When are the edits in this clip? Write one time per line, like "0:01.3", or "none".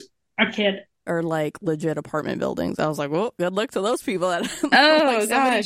0:01.1